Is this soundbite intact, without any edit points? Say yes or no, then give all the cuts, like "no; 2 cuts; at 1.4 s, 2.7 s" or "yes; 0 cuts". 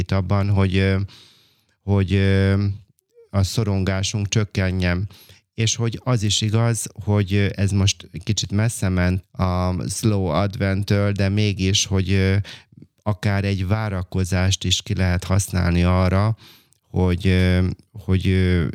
no; 1 cut; at 9.2 s